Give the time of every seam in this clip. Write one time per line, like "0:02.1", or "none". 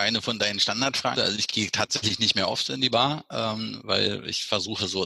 0:01.2